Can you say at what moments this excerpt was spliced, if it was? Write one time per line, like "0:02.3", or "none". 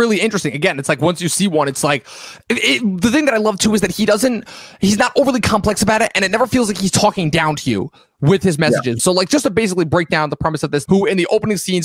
0:09.0
0:10.9